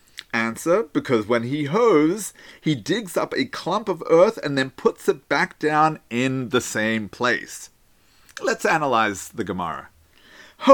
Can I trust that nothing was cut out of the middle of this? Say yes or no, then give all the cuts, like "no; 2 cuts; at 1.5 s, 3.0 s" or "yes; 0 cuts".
yes; 0 cuts